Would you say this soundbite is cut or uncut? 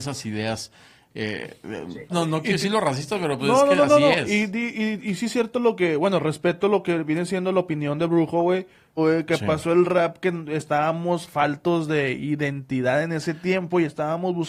cut